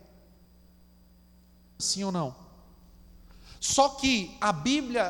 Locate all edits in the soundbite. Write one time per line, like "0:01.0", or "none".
0:01.8